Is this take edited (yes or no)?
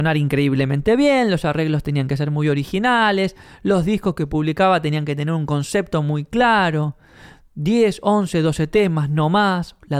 no